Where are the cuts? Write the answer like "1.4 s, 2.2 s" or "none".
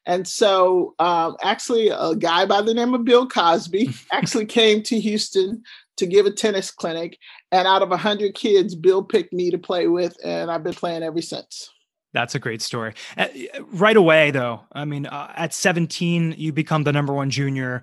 none